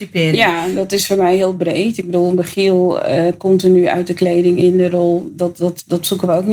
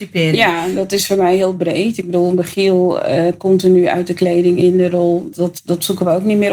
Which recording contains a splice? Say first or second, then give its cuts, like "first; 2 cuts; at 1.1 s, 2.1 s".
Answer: second; 1 cut; at 5.3 s